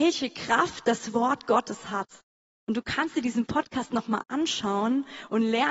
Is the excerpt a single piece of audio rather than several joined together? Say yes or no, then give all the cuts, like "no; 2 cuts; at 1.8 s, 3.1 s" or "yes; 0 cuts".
yes; 0 cuts